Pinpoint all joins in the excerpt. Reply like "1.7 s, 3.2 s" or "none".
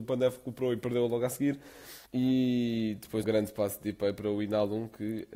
2.1 s, 3.2 s